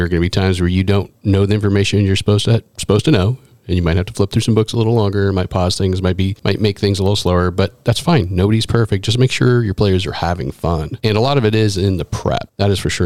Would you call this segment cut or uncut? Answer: uncut